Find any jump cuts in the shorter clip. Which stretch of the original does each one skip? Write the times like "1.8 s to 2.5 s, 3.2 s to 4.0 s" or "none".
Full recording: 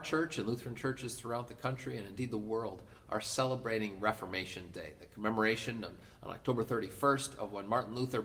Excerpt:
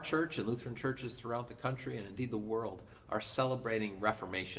none